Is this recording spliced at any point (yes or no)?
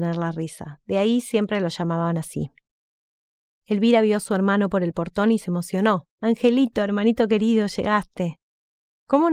yes